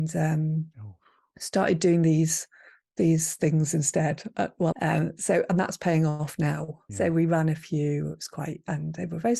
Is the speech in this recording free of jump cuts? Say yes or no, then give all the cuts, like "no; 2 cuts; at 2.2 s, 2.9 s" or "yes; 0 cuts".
no; 2 cuts; at 4.7 s, 6.9 s